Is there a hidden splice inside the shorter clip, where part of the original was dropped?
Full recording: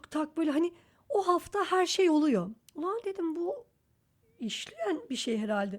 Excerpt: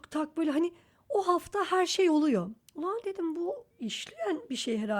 yes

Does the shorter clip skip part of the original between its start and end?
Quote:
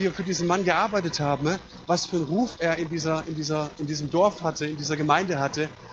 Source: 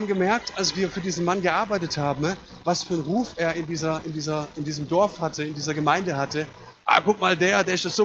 no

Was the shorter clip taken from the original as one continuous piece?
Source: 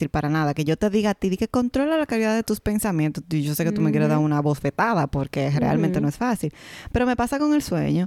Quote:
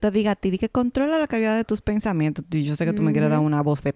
yes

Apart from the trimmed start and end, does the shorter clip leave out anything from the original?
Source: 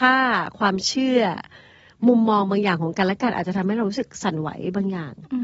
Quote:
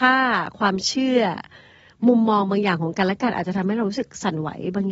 no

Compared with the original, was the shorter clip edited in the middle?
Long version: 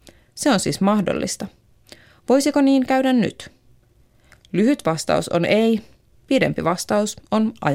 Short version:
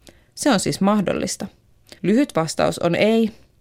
yes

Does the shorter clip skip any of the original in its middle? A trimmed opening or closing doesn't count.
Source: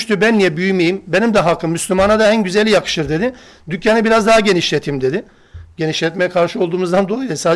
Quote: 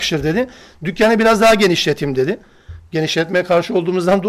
no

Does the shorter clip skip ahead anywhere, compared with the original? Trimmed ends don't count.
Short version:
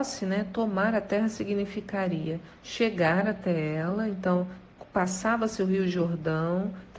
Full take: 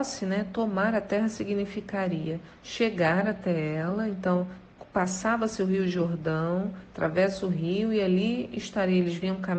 no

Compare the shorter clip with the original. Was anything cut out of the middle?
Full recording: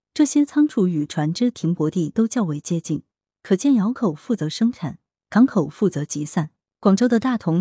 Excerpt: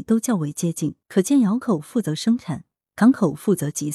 yes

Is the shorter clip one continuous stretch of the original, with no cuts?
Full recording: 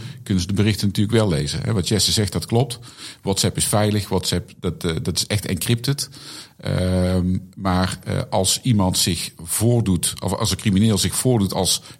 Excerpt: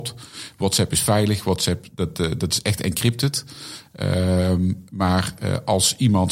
yes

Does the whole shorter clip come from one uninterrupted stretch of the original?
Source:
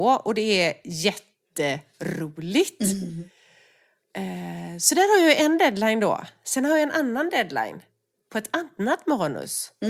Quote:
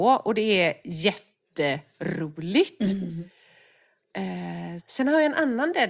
no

